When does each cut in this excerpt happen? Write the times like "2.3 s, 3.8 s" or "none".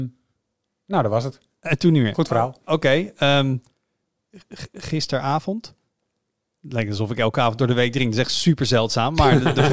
none